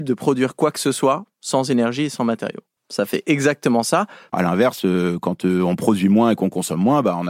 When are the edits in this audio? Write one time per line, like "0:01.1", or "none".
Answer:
0:02.8
0:04.3